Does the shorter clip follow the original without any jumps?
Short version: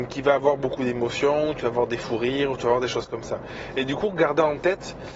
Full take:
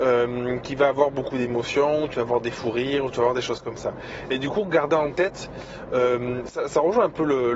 yes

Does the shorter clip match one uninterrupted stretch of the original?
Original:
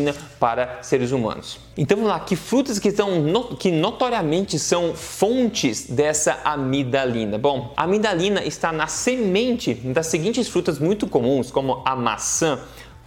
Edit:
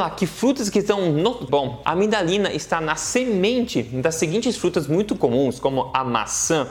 no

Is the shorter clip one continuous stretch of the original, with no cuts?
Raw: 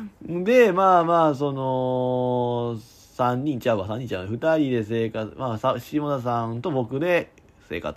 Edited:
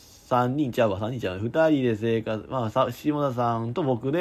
yes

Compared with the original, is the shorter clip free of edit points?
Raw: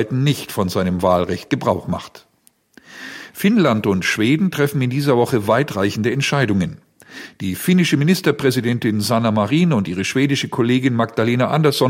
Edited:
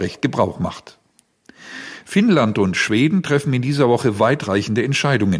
yes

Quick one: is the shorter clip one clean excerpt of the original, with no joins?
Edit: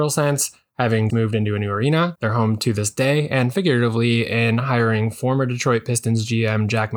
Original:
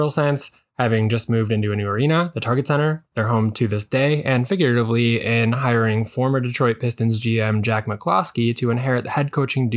no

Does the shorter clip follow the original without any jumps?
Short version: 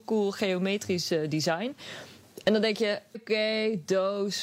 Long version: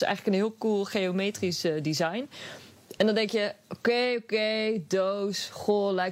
no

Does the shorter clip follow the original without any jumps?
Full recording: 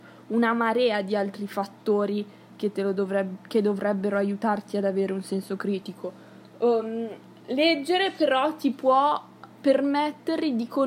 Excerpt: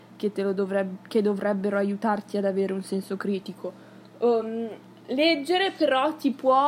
yes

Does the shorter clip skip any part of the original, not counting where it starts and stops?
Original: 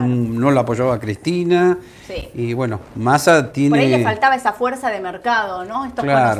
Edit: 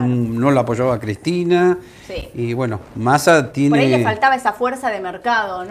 no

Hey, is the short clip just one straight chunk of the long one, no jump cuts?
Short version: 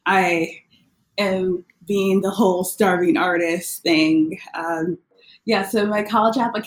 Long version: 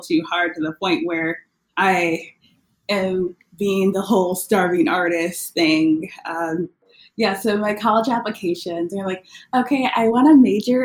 yes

